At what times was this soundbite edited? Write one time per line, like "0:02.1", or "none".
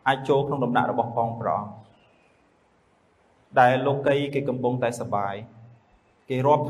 none